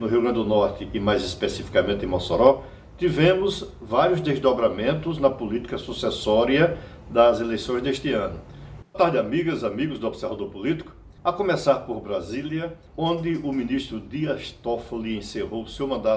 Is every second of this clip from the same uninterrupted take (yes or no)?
no